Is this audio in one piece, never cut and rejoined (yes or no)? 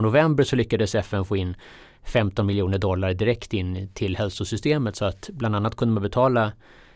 yes